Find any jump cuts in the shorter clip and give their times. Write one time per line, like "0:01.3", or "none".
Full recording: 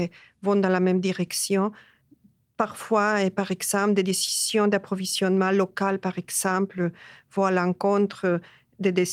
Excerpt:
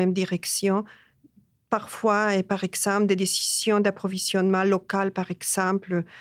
none